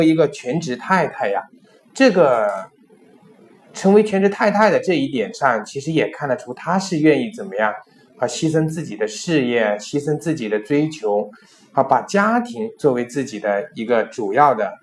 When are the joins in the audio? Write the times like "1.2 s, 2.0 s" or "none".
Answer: none